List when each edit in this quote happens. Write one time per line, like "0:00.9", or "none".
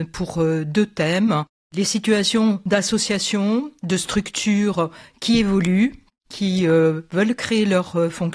none